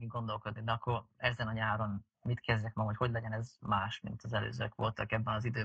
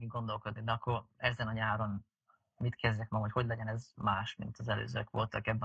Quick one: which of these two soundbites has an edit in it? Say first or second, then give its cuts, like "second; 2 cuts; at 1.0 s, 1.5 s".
first; 1 cut; at 2.1 s